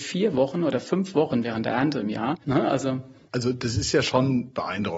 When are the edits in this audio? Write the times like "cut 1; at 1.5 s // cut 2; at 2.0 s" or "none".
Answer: cut 1; at 2.4 s